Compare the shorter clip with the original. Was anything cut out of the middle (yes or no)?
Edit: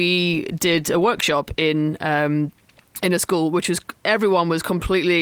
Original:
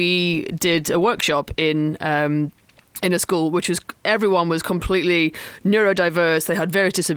no